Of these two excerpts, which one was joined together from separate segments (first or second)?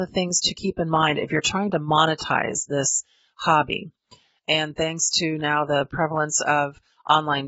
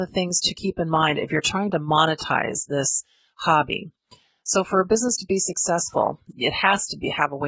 first